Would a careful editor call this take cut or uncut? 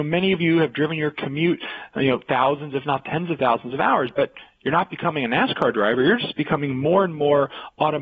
uncut